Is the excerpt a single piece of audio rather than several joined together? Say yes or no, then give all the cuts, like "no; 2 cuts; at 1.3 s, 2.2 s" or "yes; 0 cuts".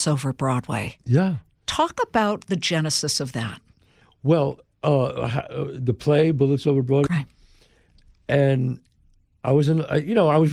no; 1 cut; at 7.1 s